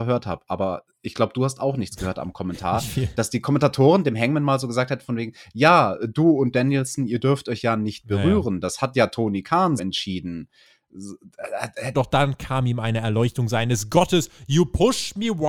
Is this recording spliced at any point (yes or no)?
yes